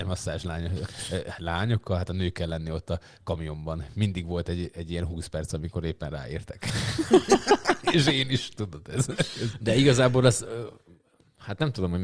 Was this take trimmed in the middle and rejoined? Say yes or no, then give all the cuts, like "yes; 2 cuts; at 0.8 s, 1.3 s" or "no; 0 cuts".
no; 0 cuts